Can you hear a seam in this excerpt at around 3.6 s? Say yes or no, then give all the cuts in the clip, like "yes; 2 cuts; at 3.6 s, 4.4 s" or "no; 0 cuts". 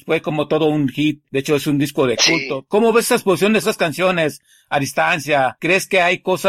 yes; 2 cuts; at 3.6 s, 5.6 s